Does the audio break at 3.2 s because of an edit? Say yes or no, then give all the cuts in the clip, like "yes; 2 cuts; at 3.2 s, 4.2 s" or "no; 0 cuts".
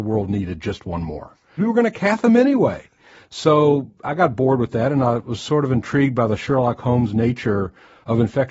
no; 1 cut; at 1.6 s